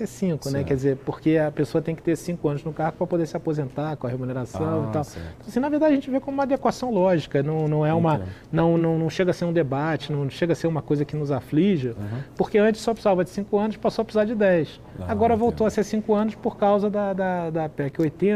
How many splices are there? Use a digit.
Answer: 1